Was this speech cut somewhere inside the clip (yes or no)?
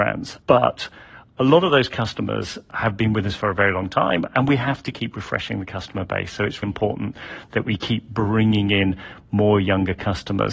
yes